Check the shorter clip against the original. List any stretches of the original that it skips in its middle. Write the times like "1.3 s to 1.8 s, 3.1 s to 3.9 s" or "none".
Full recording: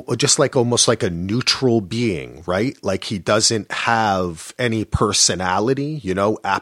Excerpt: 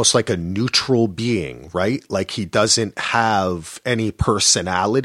none